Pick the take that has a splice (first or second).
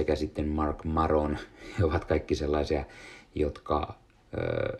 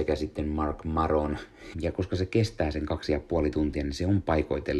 second